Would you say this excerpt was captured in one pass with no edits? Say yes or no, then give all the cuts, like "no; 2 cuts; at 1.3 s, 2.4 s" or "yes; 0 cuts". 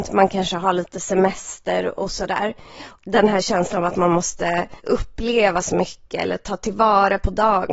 no; 2 cuts; at 3.0 s, 4.8 s